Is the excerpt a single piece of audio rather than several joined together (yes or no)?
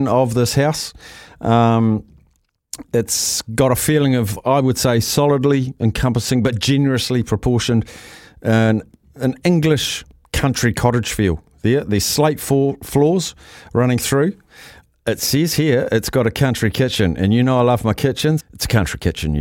no